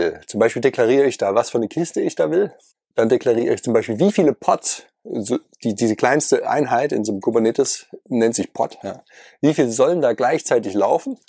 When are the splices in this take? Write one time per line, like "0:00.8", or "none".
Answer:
none

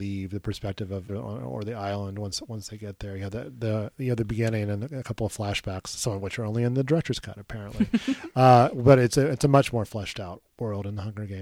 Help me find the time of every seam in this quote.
0:01.1

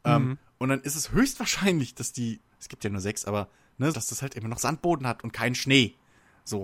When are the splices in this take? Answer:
0:02.5
0:03.9

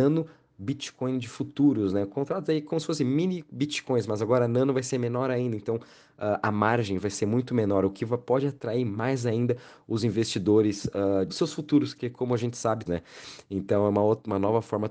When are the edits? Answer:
0:11.3
0:12.9

